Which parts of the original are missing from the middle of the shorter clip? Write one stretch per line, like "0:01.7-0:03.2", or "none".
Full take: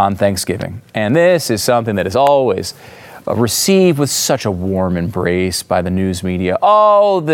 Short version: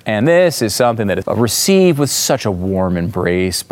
0:02.1-0:03.2